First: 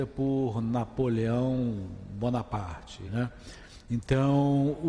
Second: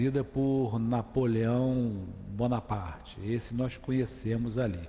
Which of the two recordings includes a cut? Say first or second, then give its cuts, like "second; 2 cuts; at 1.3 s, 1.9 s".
first; 1 cut; at 3.0 s